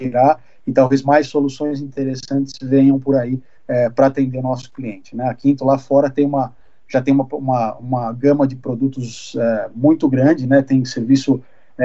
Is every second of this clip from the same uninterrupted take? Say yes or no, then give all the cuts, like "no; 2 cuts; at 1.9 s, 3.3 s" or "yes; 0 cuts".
yes; 0 cuts